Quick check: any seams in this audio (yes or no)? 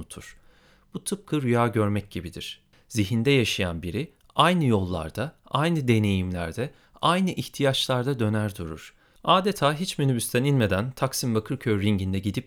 yes